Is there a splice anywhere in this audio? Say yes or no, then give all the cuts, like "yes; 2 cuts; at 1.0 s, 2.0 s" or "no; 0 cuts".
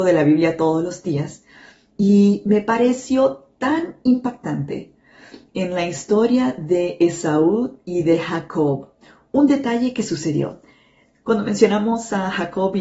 no; 0 cuts